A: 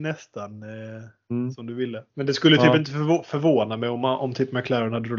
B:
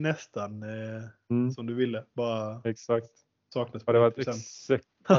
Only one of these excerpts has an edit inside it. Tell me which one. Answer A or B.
A